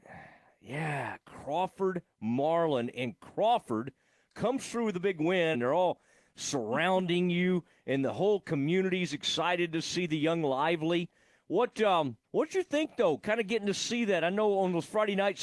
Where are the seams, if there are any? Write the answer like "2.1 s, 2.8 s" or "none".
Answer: 5.5 s, 12.2 s